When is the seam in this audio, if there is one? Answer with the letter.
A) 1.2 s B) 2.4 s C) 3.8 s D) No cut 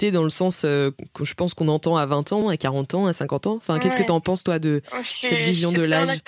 B